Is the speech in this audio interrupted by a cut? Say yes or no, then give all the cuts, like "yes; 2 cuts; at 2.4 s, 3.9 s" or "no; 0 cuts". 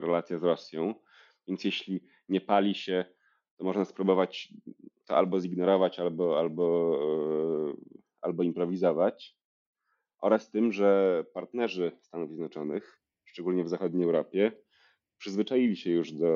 no; 0 cuts